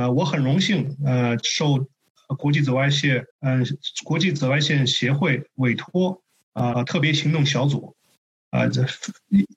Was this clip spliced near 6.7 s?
yes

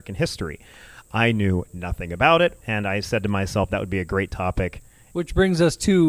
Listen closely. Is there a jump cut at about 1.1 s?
no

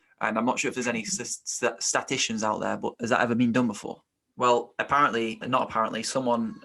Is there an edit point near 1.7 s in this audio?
no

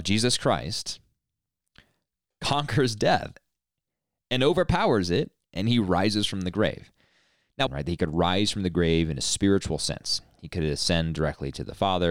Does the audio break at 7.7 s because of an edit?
yes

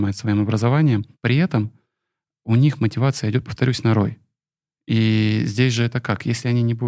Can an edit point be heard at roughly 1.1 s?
yes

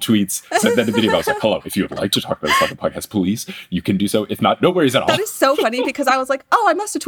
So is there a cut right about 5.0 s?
no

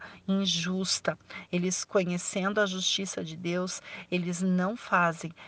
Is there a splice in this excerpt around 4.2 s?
no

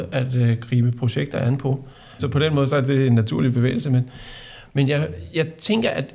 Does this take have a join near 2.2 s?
yes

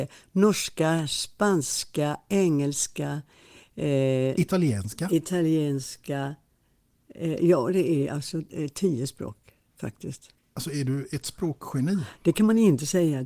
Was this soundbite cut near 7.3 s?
no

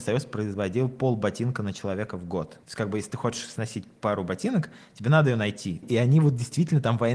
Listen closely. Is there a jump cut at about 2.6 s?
yes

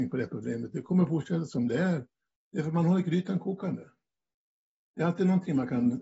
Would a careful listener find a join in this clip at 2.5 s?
yes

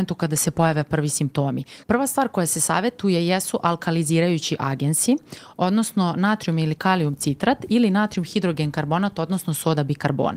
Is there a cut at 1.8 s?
yes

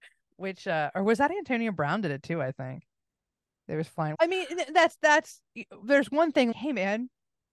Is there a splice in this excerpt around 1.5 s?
no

